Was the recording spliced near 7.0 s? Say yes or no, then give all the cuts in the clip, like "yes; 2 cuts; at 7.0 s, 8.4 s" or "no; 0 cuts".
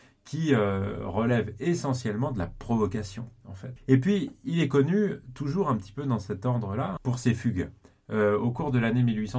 yes; 2 cuts; at 3.8 s, 7.0 s